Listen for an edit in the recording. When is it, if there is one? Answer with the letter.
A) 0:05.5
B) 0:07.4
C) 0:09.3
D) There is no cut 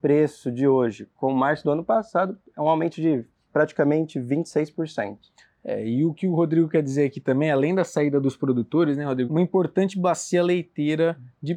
C